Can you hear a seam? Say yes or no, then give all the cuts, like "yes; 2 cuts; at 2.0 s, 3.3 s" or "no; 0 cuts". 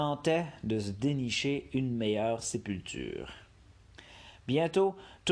no; 0 cuts